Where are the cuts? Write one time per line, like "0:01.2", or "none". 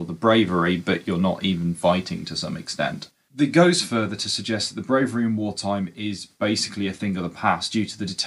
none

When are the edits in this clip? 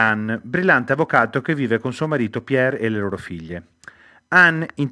none

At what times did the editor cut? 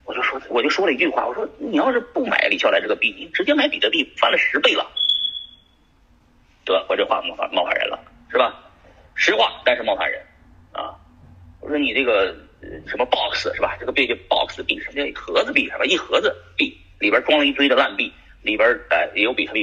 none

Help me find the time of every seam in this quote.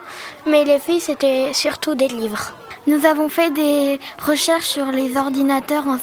none

